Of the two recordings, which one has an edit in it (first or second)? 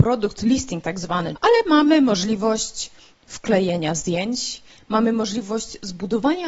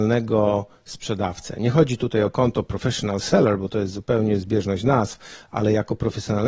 first